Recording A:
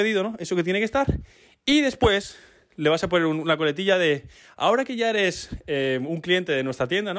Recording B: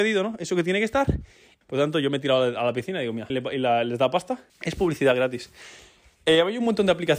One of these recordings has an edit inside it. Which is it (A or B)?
B